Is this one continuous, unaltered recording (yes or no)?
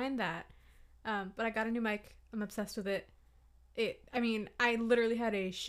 yes